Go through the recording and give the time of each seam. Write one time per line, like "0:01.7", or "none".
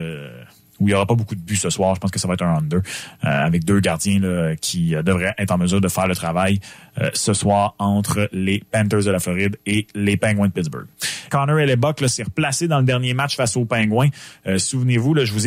0:11.3

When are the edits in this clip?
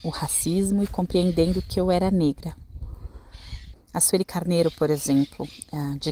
0:03.7

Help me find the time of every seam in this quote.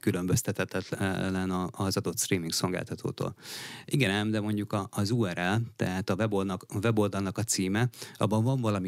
none

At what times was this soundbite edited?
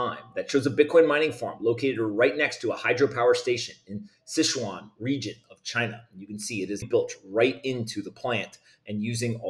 0:06.8

